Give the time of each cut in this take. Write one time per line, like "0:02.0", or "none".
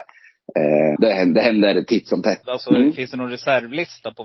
0:01.0
0:02.4